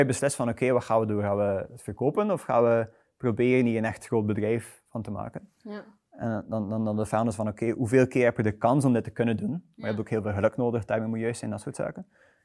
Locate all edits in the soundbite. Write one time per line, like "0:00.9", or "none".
none

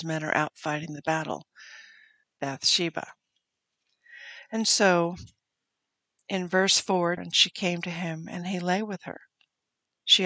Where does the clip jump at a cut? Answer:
0:02.2
0:07.2

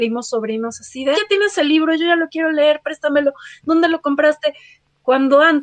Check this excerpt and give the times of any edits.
0:01.1

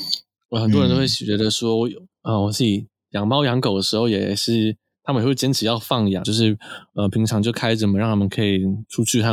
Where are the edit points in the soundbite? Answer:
0:06.2

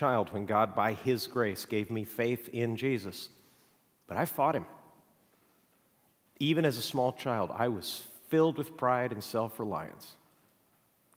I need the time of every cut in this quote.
none

